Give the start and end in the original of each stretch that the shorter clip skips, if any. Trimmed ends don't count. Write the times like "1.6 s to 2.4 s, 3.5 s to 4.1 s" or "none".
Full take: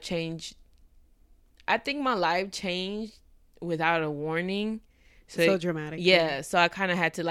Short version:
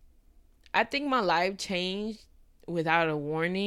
none

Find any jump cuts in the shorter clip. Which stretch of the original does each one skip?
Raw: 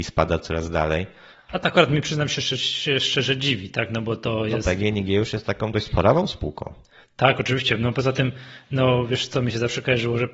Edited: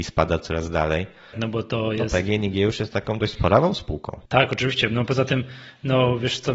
1.3 s to 3.9 s, 6.8 s to 7.1 s

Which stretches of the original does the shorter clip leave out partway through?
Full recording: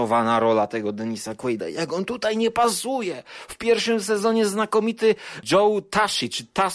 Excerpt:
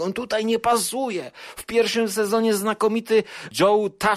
none

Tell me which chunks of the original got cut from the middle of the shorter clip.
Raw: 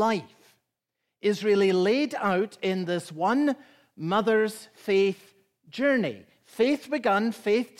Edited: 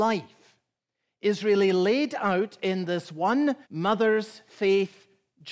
3.6 s to 3.9 s

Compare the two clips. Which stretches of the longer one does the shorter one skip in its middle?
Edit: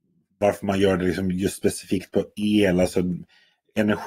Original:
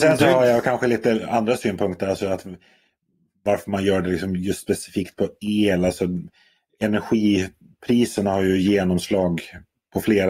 none

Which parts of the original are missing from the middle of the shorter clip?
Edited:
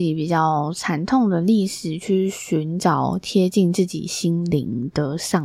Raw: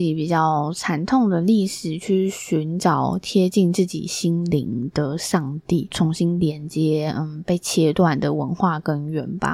none

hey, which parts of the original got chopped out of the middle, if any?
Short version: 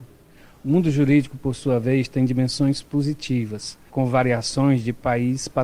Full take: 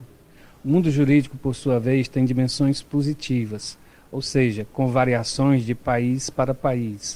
3.9 s to 4.7 s

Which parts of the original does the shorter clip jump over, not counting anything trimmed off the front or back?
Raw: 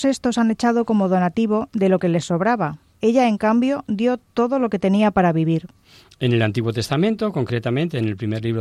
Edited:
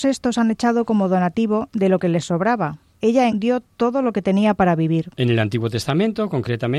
3.3 s to 3.9 s, 5.7 s to 6.2 s

